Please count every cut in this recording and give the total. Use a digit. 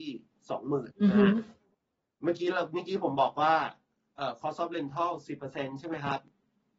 1